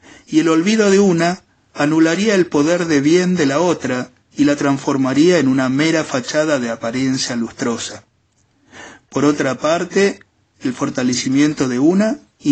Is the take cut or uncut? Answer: uncut